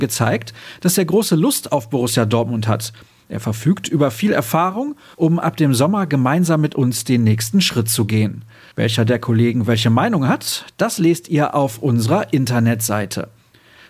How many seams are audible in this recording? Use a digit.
2